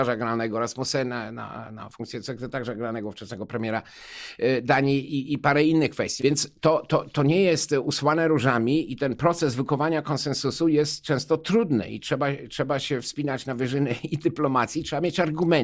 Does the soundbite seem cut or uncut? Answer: cut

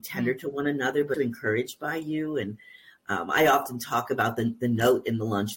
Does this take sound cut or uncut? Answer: cut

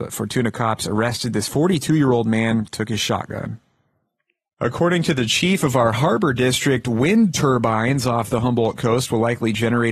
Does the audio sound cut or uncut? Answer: cut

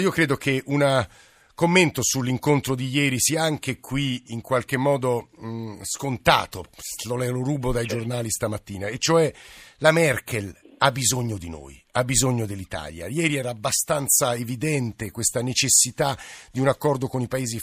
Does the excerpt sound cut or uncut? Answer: uncut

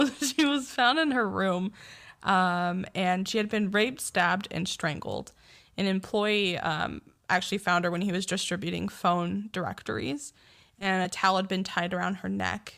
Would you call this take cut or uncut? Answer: uncut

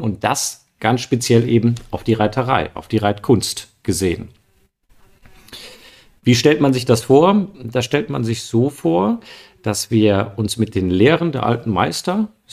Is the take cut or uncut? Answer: uncut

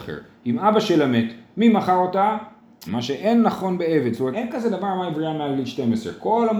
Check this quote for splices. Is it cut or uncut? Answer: cut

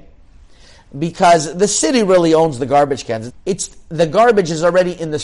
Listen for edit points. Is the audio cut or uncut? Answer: cut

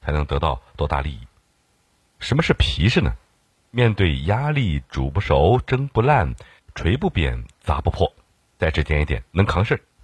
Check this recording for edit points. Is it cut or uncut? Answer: uncut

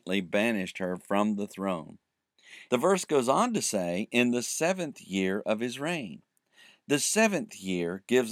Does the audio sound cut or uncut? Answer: cut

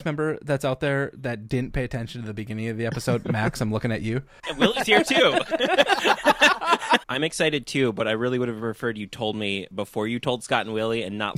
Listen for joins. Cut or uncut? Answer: cut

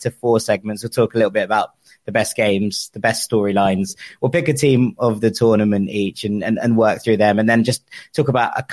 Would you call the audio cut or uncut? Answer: uncut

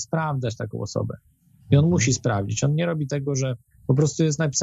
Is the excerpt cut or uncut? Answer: uncut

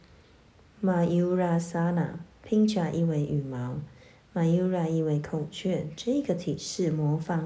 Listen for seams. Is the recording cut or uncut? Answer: uncut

